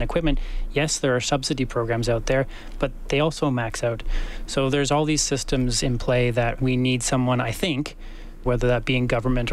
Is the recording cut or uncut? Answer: cut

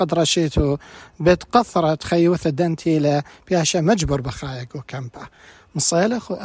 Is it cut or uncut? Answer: uncut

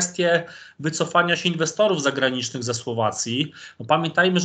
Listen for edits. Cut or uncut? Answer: uncut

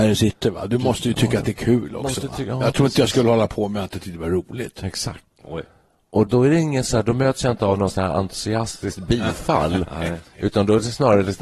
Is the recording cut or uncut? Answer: cut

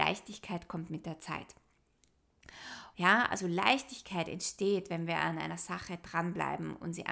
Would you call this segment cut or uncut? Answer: cut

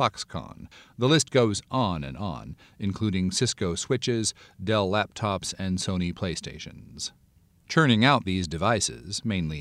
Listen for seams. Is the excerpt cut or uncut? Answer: uncut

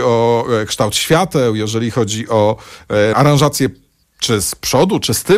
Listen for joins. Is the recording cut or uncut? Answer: cut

